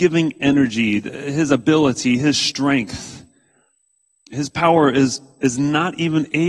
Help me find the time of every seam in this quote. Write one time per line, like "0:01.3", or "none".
none